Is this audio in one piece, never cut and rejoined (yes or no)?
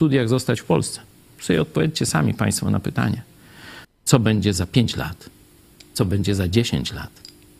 no